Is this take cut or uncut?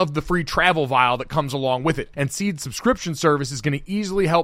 cut